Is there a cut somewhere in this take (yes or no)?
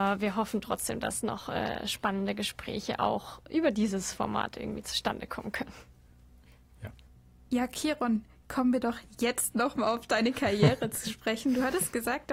no